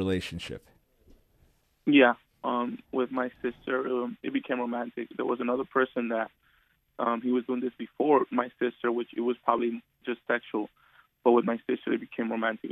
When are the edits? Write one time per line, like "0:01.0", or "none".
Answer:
none

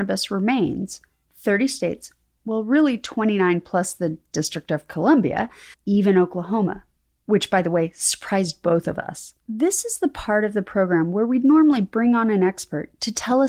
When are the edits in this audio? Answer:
0:05.7
0:09.4

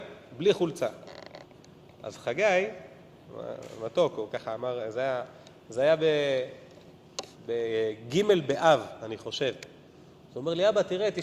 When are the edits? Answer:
none

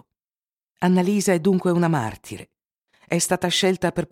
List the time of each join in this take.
none

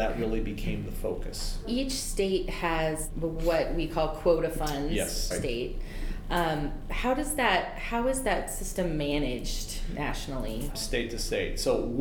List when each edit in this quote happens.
0:05.3
0:10.7

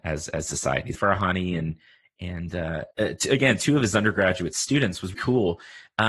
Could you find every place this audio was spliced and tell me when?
0:00.9
0:02.9
0:05.1

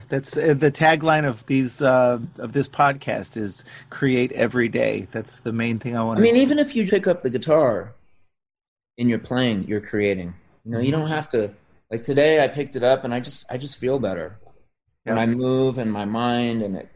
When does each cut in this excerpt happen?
0:06.9

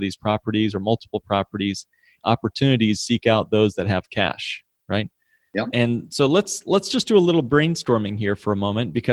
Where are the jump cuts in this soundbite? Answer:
0:02.2
0:05.7

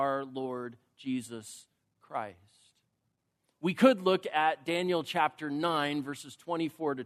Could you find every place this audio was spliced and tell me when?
0:03.5

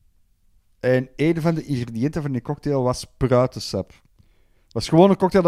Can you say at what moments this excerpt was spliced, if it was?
none

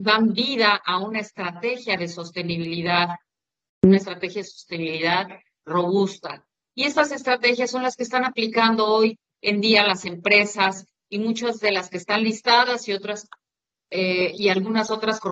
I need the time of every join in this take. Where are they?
none

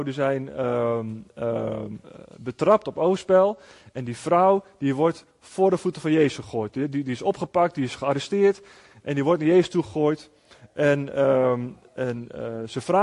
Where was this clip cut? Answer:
none

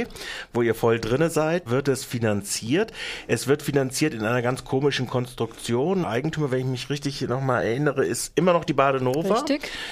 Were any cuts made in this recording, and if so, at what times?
0:01.7
0:06.0

